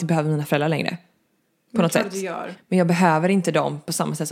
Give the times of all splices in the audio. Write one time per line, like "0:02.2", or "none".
0:02.6